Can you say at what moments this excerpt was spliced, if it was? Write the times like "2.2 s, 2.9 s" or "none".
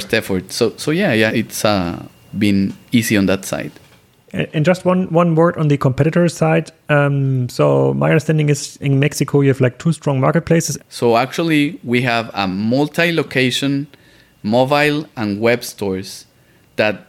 1.3 s, 8.8 s, 10.8 s

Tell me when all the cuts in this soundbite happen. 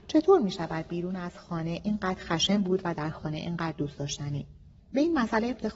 4.8 s

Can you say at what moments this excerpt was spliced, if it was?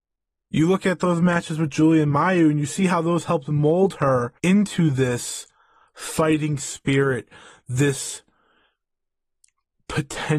4.4 s

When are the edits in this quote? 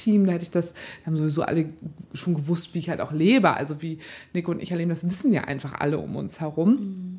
none

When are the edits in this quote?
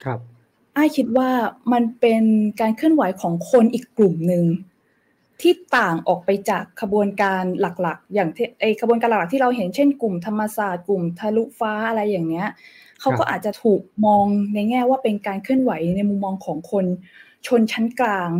none

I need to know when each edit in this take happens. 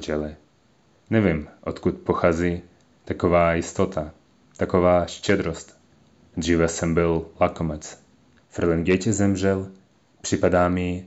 8.4 s

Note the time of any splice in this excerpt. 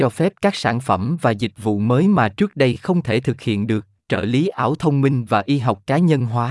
4.0 s

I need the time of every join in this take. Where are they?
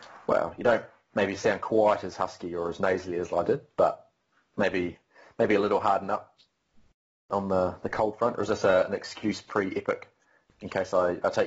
none

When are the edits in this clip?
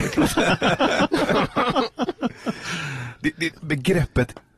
3.5 s

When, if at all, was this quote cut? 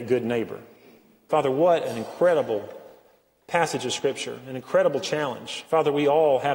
1.3 s

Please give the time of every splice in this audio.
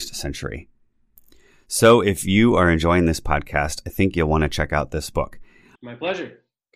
5.8 s

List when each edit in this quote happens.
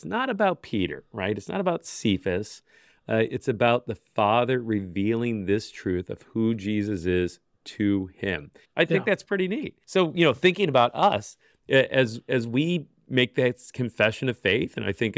8.6 s, 9.8 s

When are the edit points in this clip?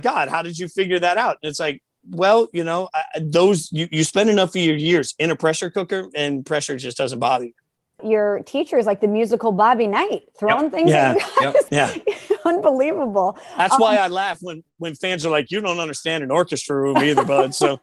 15.5 s

